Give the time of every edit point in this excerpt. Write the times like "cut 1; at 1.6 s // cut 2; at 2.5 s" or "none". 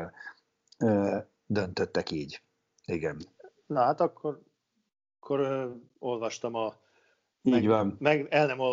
none